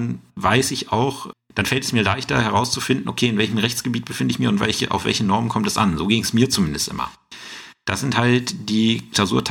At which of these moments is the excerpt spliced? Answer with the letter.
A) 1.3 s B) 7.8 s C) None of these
A